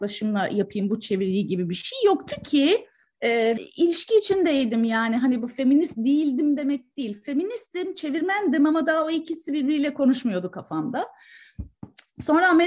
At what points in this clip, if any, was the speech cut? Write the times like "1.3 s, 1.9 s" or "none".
3.6 s